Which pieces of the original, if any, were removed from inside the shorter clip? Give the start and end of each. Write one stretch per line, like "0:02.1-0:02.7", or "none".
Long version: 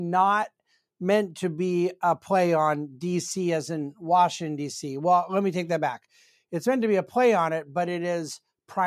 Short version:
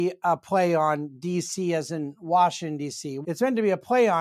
0:05.0-0:06.5